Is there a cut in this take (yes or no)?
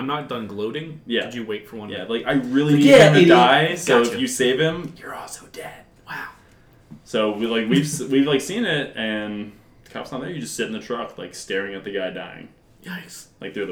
no